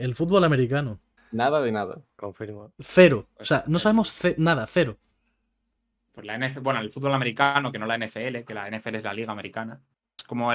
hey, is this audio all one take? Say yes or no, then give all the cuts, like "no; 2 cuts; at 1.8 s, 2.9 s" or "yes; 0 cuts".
no; 1 cut; at 1.2 s